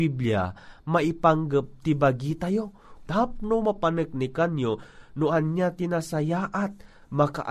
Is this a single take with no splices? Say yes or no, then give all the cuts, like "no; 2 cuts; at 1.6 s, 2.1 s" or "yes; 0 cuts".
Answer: no; 1 cut; at 3.1 s